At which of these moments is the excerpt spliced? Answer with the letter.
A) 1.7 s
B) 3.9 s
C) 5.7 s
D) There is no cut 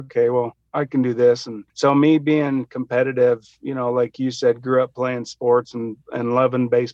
A